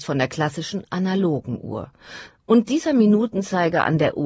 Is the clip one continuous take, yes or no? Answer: no